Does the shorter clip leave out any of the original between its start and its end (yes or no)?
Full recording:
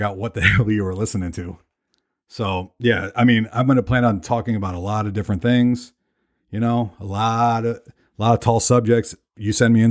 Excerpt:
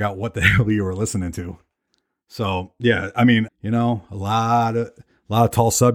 yes